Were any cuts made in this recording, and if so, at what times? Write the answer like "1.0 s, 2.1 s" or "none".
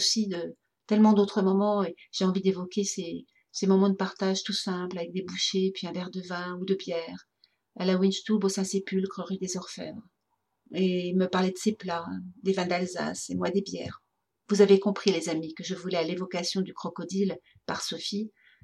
none